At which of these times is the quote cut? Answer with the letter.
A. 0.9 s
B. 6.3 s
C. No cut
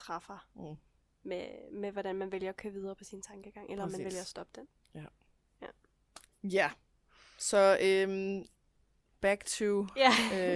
B